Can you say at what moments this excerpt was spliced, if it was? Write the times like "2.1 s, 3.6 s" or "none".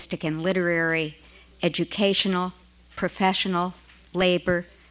none